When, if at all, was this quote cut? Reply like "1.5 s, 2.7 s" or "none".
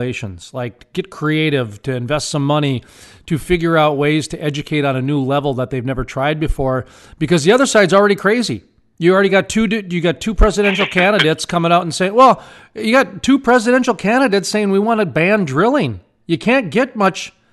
none